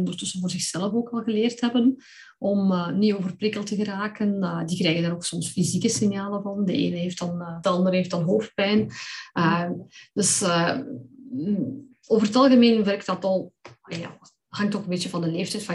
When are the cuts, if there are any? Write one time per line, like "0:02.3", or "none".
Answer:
0:07.6